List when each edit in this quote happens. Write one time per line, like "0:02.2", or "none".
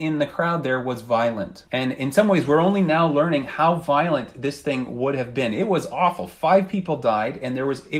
0:01.6